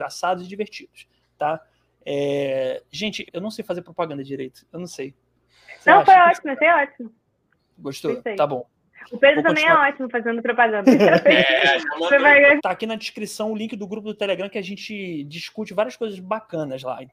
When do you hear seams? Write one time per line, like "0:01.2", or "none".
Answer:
0:03.3
0:10.8
0:12.6